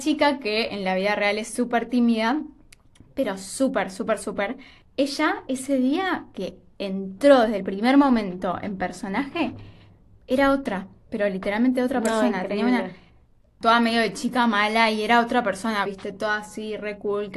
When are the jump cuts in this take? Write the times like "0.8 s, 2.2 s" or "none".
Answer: 15.9 s